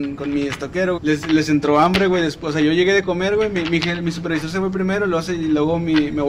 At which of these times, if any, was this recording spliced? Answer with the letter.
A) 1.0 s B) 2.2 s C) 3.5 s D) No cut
A